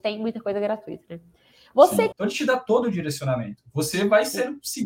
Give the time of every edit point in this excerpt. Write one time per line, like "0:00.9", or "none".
0:02.1